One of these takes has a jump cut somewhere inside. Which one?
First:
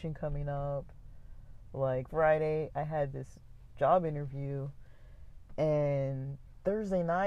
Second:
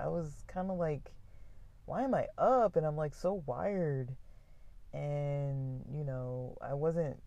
first; 1 cut; at 2.1 s

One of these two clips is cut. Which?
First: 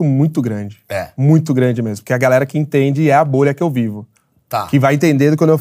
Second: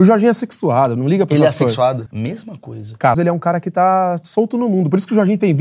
second; 2 cuts; at 2.1 s, 3.1 s

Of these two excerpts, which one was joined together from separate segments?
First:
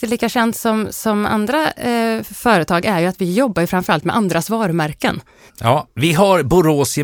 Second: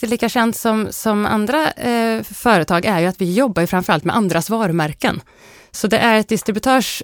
first; 1 cut; at 5.5 s

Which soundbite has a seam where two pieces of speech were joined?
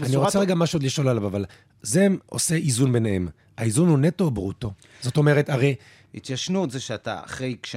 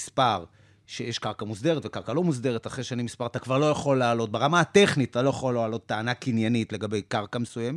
first; 1 cut; at 6.1 s

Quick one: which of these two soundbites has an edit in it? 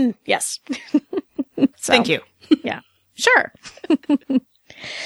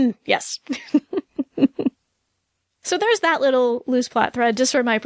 first; 1 cut; at 1.7 s

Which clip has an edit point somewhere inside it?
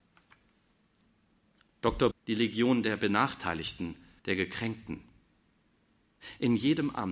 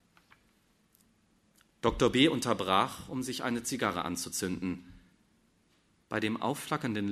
first; 2 cuts; at 2.1 s, 4.2 s

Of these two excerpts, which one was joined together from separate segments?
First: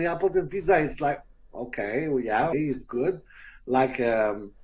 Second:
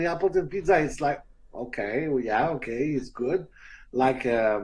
first; 1 cut; at 2.5 s

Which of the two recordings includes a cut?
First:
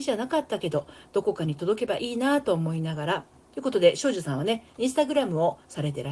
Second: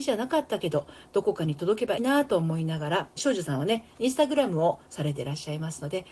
second; 2 cuts; at 2.0 s, 3.2 s

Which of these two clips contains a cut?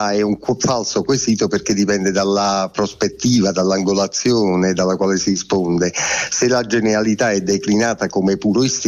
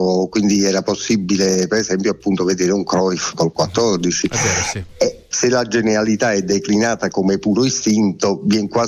second; 1 cut; at 5.3 s

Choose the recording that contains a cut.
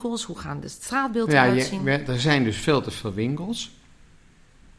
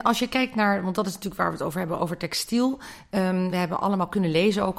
second; 2 cuts; at 2.0 s, 3.5 s

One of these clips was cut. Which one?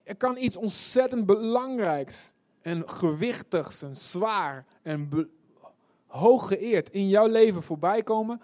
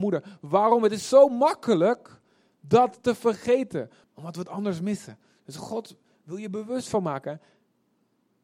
second; 1 cut; at 4.0 s

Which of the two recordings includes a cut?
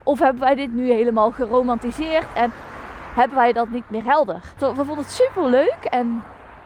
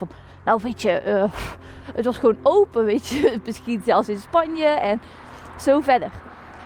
first; 1 cut; at 4.6 s

